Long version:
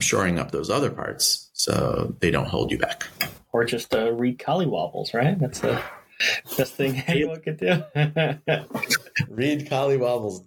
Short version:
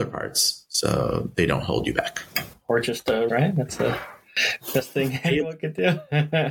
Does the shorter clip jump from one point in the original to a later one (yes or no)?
yes